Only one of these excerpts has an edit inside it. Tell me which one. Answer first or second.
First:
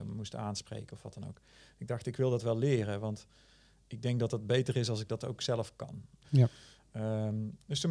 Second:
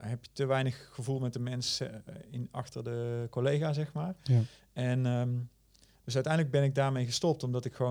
first